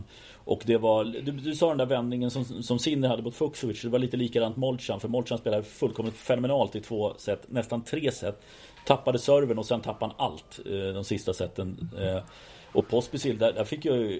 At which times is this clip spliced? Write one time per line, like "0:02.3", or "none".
none